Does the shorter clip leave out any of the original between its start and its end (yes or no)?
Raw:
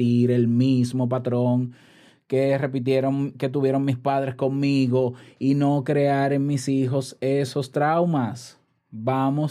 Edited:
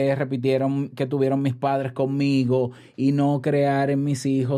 no